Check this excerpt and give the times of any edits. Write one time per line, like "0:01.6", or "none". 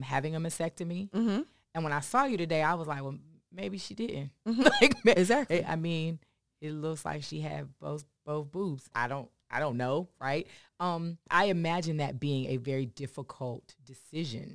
0:08.9
0:11.3